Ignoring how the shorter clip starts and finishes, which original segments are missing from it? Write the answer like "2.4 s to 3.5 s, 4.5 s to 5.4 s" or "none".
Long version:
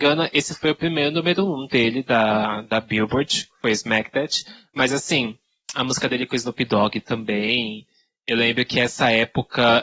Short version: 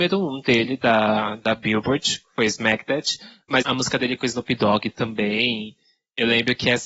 4.9 s to 5.7 s